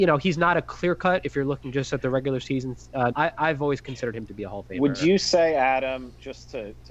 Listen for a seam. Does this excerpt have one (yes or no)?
yes